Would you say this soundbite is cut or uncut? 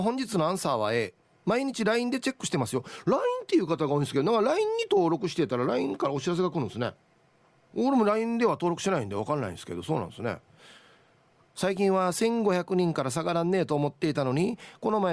uncut